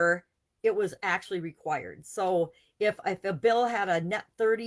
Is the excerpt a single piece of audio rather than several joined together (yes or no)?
yes